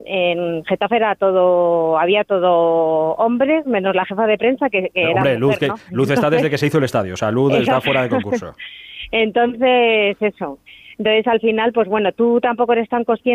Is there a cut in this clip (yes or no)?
no